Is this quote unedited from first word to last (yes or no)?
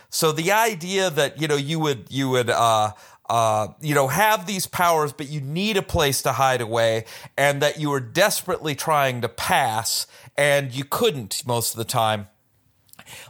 yes